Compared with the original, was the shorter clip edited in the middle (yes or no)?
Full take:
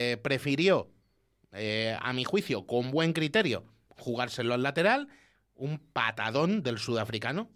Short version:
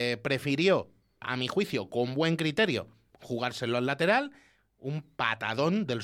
yes